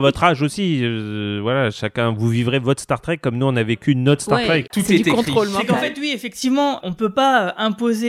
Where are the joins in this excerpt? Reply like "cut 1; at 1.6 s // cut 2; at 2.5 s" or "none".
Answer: cut 1; at 4.7 s // cut 2; at 6.8 s